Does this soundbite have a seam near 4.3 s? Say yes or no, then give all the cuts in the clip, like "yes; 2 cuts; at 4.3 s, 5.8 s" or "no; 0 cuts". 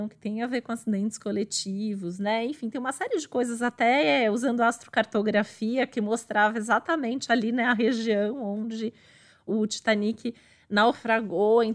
no; 1 cut; at 9.5 s